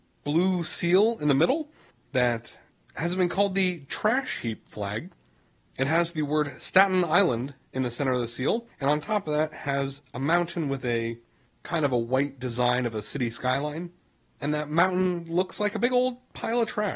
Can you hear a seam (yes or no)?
yes